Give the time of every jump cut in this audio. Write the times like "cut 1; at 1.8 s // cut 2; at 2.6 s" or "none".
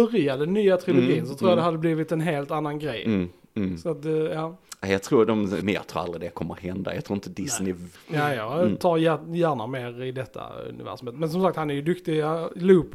cut 1; at 5.6 s // cut 2; at 8.0 s